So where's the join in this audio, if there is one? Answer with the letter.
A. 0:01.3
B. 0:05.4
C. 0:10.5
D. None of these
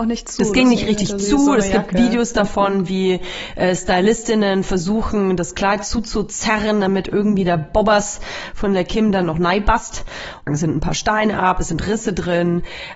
C